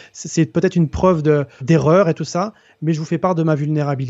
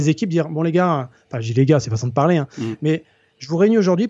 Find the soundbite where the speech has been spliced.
first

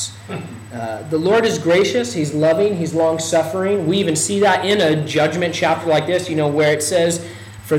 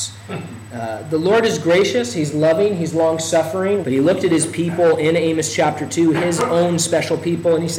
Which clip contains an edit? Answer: second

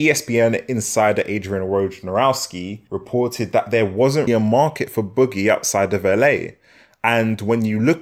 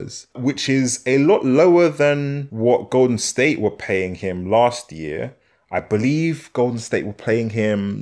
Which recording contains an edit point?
first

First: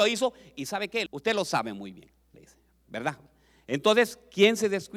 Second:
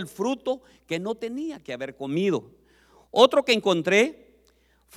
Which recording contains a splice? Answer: first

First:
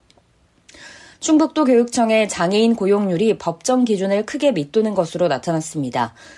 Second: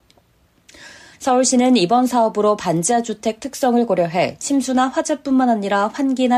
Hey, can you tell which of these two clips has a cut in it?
second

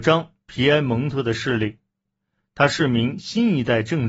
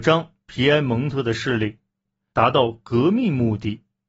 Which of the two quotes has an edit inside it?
second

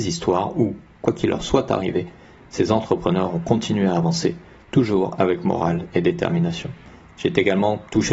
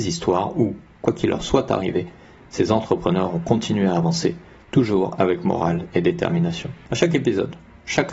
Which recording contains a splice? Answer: second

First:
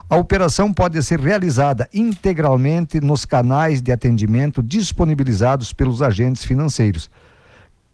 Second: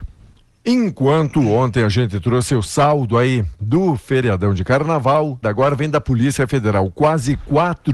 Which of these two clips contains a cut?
second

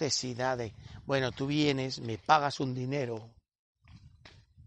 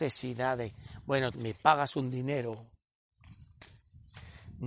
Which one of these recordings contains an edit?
second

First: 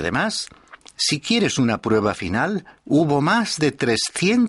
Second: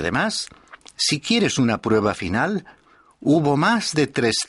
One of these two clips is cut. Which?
first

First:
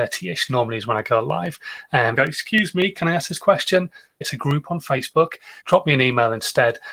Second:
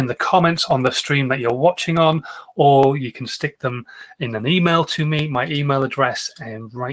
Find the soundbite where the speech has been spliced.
first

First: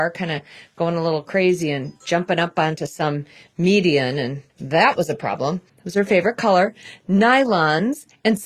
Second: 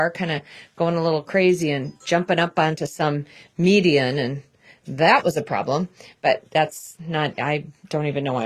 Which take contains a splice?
first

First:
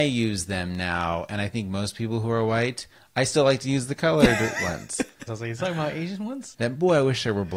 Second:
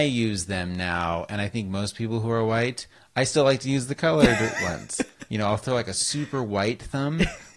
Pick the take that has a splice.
first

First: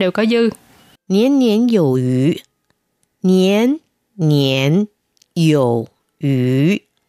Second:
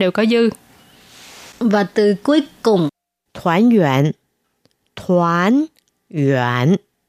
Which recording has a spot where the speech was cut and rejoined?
first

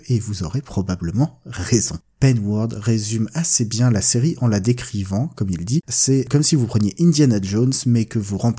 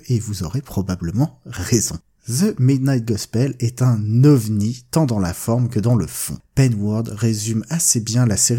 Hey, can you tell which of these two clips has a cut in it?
first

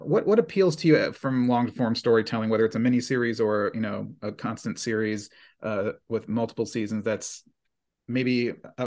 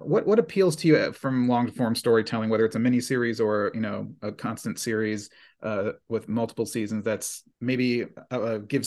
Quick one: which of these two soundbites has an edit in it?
second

